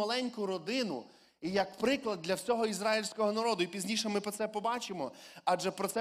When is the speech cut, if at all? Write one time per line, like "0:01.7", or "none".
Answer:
none